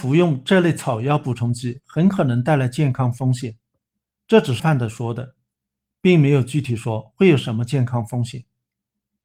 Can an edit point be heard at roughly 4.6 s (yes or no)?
yes